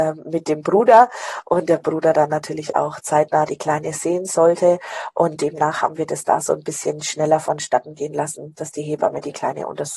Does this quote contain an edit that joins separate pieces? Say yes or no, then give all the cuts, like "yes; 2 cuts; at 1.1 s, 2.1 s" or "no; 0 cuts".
no; 0 cuts